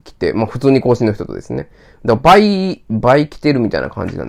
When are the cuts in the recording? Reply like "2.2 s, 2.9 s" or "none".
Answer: none

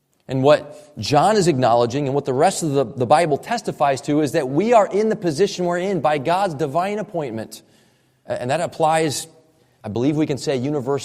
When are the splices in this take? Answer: none

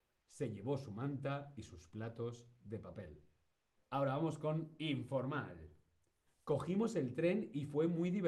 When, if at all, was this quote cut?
3.8 s, 6.3 s

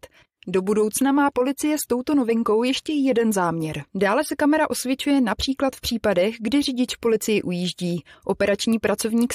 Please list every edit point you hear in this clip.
3.9 s

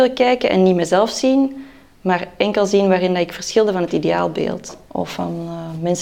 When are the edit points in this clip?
4.9 s

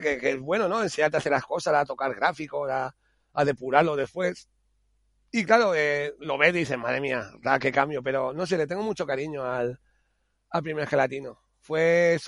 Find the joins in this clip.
none

